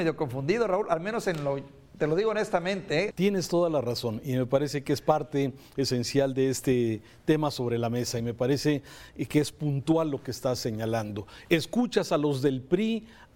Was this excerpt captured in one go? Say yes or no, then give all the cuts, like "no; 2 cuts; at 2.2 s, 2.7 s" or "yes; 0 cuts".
no; 2 cuts; at 3.1 s, 11.4 s